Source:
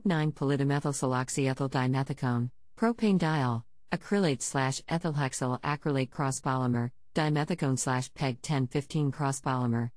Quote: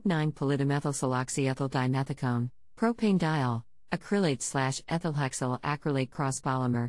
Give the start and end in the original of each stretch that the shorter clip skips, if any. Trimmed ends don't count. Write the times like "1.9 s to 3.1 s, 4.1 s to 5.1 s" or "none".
none